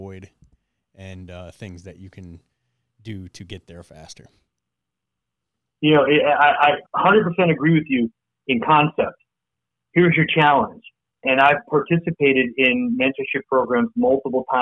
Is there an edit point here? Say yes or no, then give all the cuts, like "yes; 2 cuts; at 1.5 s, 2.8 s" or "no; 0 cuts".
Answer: yes; 2 cuts; at 6.9 s, 11.2 s